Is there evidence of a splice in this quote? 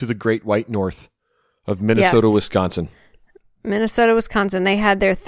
no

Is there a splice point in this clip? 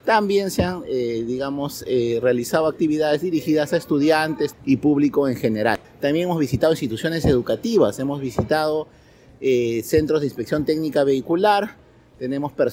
yes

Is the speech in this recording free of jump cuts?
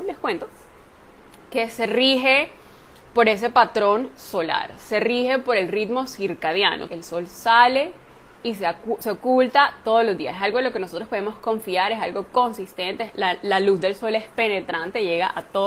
no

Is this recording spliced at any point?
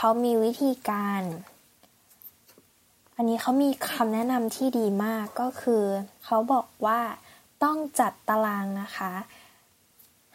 no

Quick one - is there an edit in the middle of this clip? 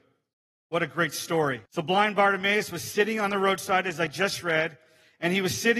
yes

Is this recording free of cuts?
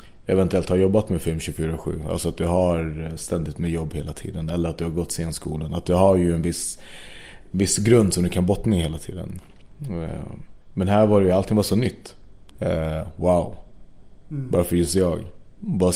no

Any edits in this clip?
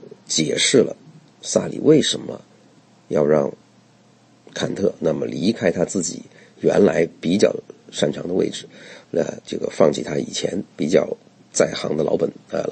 yes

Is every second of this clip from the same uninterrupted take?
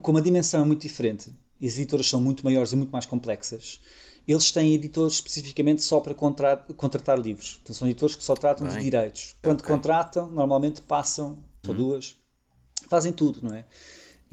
no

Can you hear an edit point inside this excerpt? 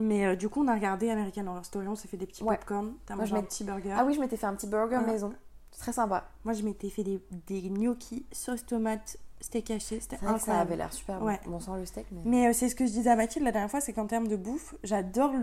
no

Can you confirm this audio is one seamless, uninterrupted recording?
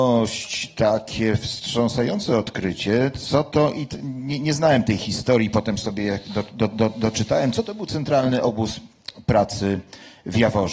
yes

